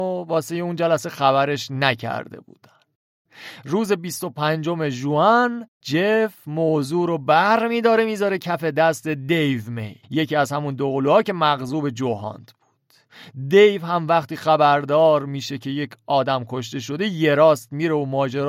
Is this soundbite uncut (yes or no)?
no